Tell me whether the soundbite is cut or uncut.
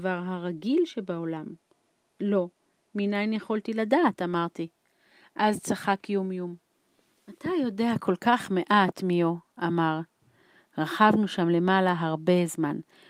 uncut